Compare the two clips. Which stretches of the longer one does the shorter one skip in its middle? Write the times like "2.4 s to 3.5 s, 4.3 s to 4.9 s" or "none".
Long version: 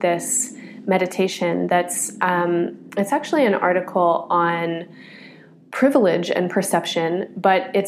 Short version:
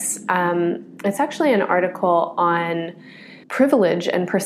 5.4 s to 5.7 s